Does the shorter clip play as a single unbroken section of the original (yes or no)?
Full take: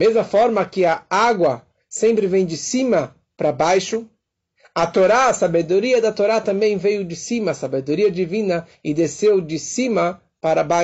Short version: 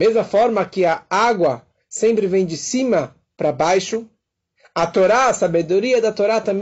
yes